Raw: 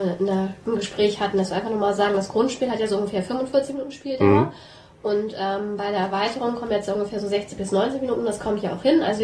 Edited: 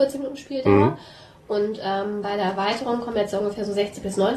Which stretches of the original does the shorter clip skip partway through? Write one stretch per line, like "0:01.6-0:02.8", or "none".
none